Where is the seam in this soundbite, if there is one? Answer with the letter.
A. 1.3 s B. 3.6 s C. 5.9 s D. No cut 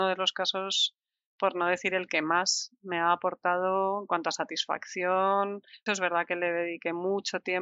C